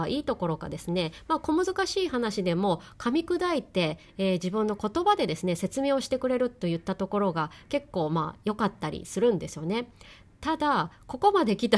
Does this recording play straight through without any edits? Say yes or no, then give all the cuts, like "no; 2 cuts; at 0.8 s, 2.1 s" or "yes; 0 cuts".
yes; 0 cuts